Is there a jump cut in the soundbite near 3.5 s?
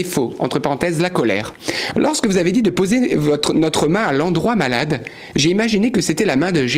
no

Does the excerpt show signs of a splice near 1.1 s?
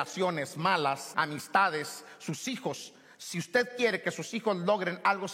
yes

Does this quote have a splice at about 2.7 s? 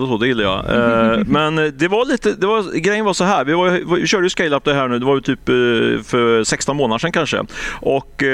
no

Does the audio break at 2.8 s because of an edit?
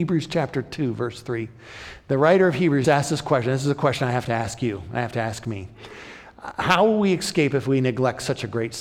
yes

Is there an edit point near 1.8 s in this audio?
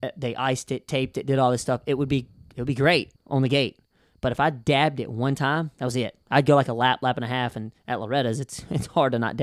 no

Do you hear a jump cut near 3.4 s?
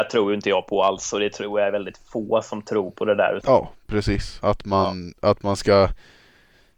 yes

